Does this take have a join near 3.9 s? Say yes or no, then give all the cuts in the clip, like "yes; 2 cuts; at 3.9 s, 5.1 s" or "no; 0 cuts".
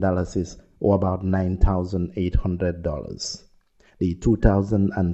yes; 1 cut; at 3.9 s